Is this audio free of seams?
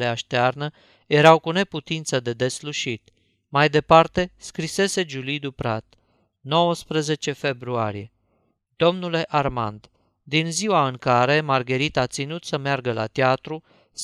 yes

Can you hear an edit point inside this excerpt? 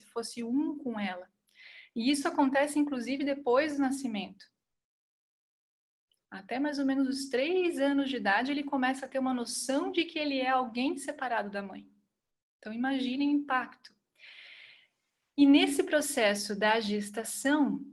no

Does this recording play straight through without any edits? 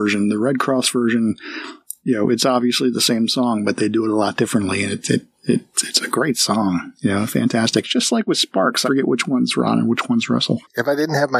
no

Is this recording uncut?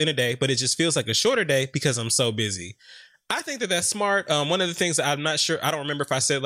yes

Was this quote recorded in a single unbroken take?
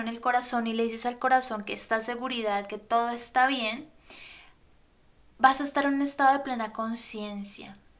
yes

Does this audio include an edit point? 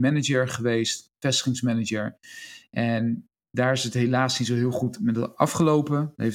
no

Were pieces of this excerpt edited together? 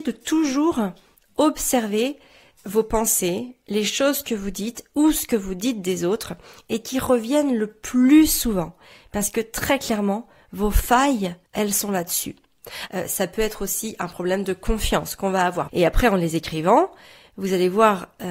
yes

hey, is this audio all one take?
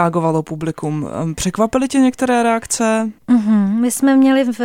no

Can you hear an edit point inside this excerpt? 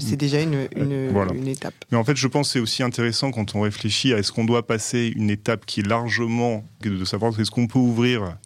yes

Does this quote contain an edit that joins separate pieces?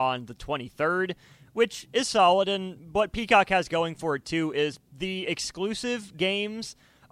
no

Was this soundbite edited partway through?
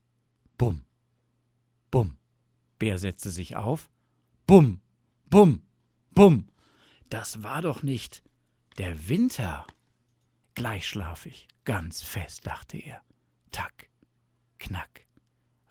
yes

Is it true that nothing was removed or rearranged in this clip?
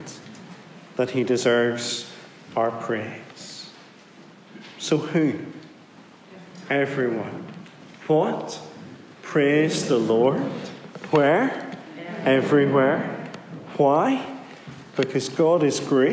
yes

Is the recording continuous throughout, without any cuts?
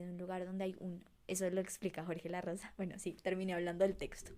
yes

